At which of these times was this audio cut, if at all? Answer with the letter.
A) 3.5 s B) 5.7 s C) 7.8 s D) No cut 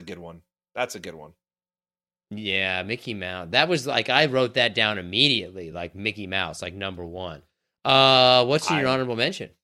D